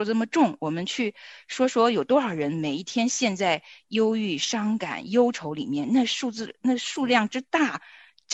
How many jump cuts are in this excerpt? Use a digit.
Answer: 0